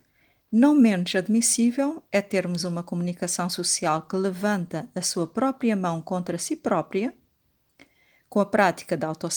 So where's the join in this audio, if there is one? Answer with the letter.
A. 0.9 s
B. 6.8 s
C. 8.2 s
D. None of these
D